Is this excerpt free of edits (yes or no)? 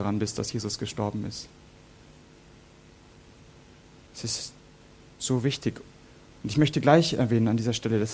no